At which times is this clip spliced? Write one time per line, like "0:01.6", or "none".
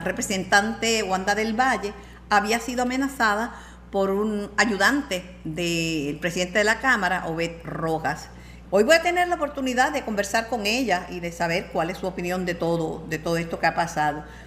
0:08.6